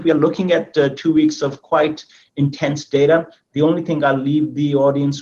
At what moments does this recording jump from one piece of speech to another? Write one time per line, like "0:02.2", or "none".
none